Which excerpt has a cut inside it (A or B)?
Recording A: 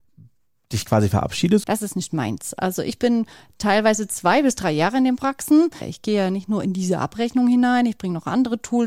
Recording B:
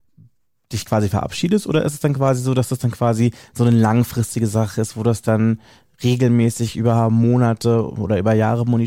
A